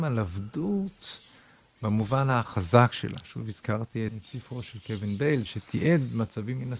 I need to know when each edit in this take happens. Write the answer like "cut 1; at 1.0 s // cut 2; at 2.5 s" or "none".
cut 1; at 4.1 s // cut 2; at 5.5 s